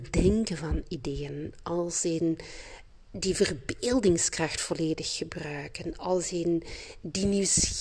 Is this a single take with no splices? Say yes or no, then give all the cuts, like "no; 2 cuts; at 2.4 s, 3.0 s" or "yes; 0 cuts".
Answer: yes; 0 cuts